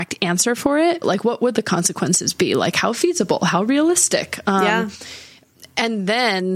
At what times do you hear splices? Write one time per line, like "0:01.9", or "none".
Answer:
0:01.0